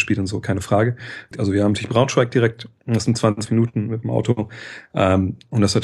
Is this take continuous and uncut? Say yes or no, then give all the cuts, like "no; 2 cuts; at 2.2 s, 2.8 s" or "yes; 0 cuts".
no; 1 cut; at 1.3 s